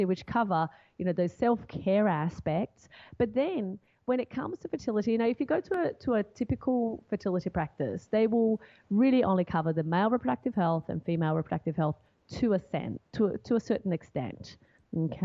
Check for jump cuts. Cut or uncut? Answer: uncut